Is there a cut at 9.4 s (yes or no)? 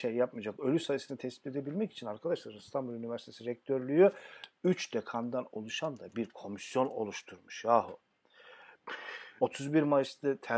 yes